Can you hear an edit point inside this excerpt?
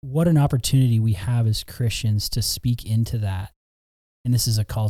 no; 0 cuts

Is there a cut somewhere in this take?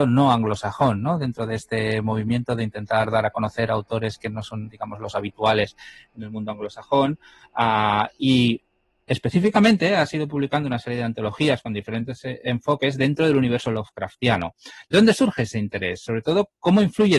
no; 0 cuts

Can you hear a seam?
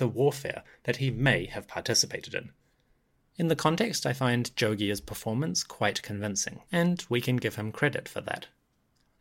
yes; 2 cuts; at 3.2 s, 6.7 s

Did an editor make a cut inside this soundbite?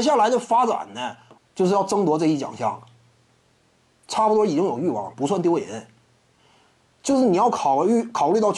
yes; 2 cuts; at 1.4 s, 5.1 s

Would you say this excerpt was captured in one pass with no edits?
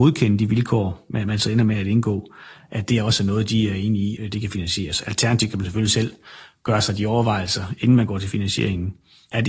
no; 1 cut; at 4.2 s

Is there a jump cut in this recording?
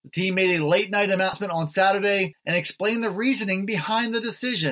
no; 0 cuts

